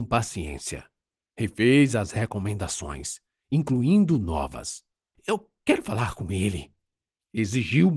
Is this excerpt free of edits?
no; 1 cut; at 5.2 s

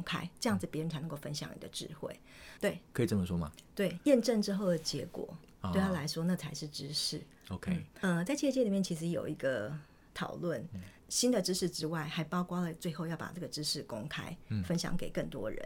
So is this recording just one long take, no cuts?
no; 2 cuts; at 2.6 s, 11.0 s

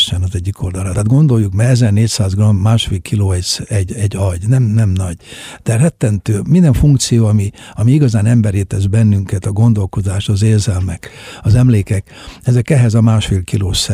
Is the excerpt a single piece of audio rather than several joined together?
no; 1 cut; at 0.9 s

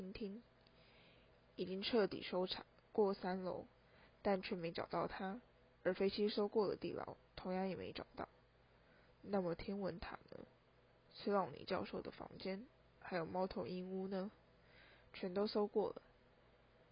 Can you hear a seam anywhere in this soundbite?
no; 0 cuts

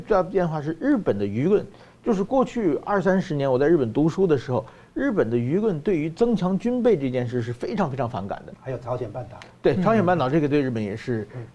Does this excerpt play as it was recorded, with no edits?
no; 1 cut; at 8.5 s

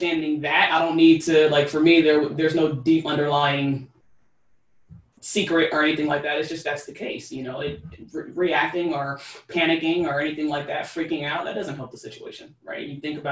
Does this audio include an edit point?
no; 0 cuts

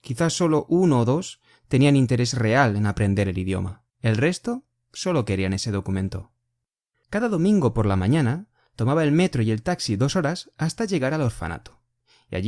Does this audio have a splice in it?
yes; 2 cuts; at 3.9 s, 6.9 s

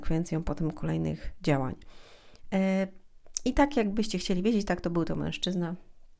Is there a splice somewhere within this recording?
no; 0 cuts

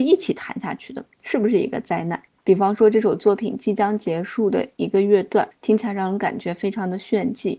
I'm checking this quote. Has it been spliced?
yes; 2 cuts; at 2.4 s, 5.5 s

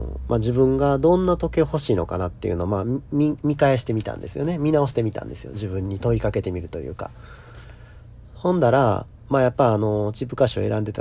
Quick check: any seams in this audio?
no; 0 cuts

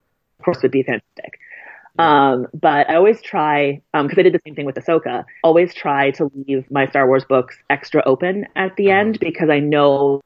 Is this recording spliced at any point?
yes; 1 cut; at 5.4 s

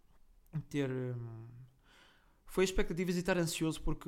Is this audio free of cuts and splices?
yes; 0 cuts

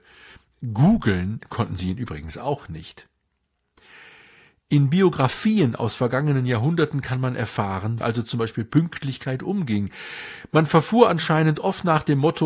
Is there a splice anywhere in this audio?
yes; 1 cut; at 8.0 s

